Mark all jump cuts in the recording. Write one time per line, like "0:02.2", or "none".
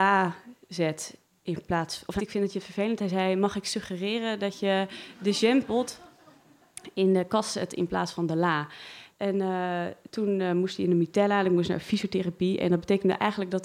0:02.2
0:09.1

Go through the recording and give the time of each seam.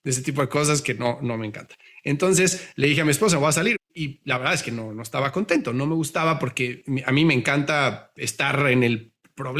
0:03.7

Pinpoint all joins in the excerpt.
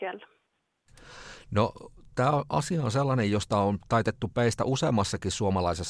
none

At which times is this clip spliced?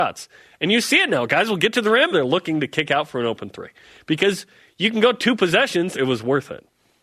0:02.1
0:05.9

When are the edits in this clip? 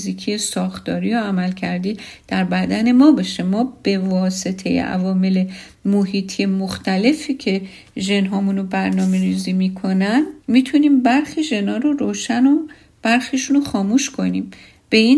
0:10.4

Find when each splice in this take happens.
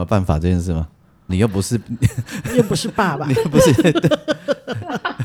0:01.3

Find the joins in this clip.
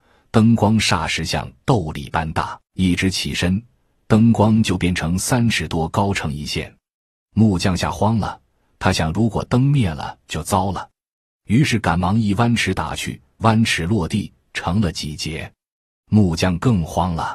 0:02.7

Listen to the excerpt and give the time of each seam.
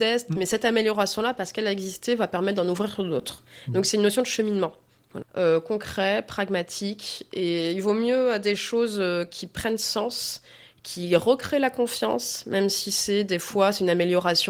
0:05.2

